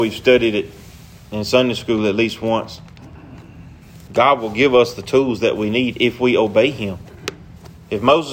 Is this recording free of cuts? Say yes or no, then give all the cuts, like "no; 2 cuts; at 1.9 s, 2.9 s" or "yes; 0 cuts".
no; 1 cut; at 4.1 s